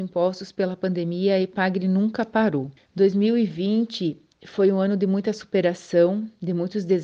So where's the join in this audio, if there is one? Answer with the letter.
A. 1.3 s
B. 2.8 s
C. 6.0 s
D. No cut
B